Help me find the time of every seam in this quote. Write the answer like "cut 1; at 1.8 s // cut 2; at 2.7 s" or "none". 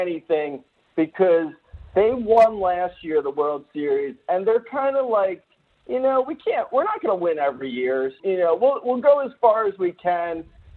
cut 1; at 8.2 s